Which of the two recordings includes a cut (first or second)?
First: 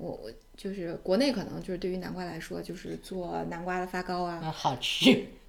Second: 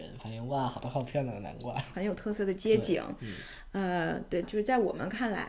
second